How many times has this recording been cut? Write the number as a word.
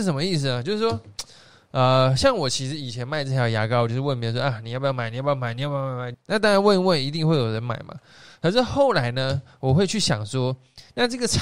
one